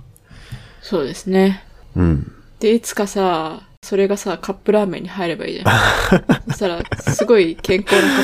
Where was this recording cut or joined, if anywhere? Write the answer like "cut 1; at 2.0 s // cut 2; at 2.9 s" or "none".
none